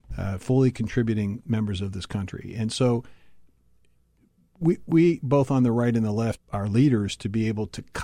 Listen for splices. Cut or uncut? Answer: cut